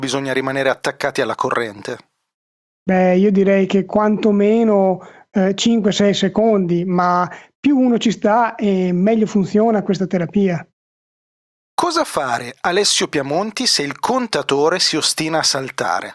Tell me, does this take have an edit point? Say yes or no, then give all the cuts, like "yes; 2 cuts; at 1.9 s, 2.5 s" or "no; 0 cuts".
no; 0 cuts